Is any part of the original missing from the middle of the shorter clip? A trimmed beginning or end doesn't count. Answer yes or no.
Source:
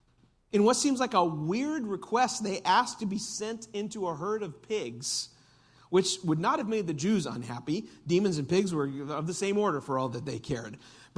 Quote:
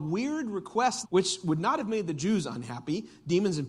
yes